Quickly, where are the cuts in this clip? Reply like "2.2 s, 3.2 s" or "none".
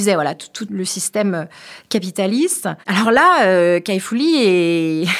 2.8 s